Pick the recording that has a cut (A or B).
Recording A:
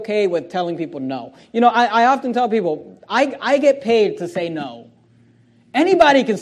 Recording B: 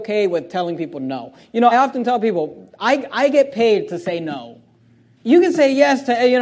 B